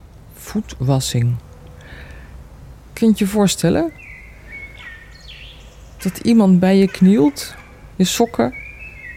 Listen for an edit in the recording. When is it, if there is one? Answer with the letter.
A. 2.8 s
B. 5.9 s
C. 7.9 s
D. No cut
C